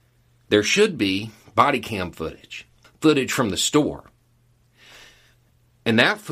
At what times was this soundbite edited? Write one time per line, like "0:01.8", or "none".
0:02.8